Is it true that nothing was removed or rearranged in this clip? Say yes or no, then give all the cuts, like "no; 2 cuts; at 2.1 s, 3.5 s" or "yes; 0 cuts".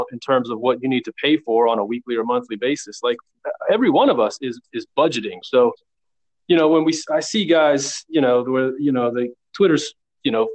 no; 1 cut; at 5.4 s